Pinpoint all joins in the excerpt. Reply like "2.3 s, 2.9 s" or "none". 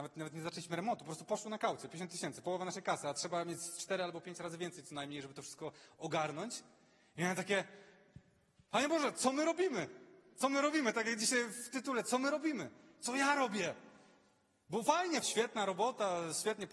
15.2 s